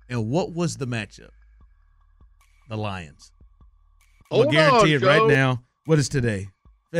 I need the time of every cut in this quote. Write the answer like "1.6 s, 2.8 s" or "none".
4.2 s